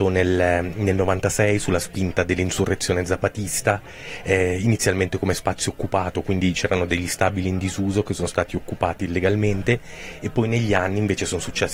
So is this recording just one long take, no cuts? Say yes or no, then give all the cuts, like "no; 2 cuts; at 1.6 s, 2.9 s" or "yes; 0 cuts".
yes; 0 cuts